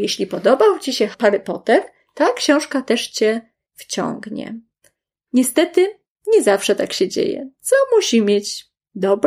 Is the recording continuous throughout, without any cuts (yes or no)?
yes